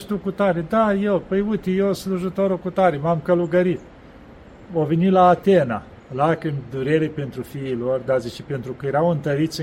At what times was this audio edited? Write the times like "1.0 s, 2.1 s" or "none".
4.7 s, 6.0 s